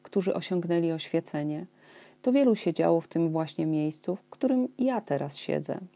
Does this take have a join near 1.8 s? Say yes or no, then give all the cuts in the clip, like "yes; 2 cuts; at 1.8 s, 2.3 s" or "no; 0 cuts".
no; 0 cuts